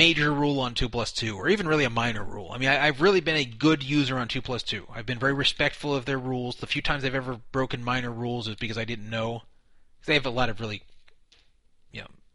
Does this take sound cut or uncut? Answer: uncut